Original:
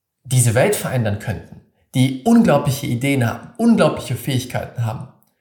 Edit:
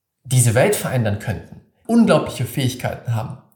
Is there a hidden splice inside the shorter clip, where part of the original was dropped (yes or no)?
yes